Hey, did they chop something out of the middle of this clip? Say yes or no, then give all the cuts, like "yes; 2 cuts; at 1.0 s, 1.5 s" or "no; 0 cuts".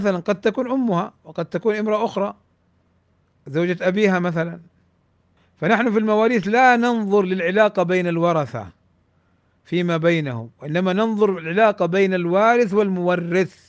no; 0 cuts